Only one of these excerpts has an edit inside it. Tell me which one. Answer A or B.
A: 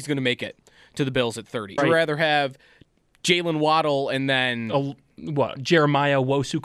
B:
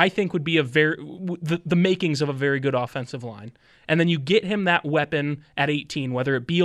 A